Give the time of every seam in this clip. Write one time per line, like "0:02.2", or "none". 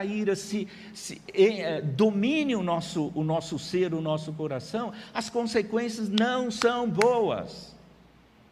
none